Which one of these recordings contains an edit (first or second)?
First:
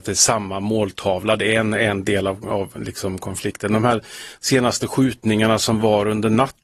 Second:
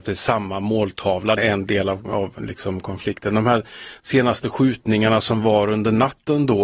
second